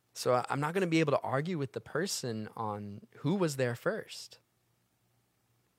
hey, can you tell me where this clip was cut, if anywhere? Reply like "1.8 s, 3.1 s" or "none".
none